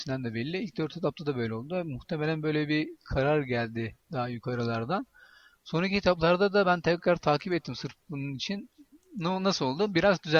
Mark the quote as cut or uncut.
uncut